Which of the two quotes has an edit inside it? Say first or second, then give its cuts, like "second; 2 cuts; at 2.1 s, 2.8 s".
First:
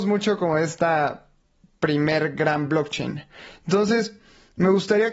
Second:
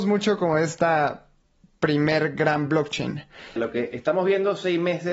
second; 1 cut; at 3.6 s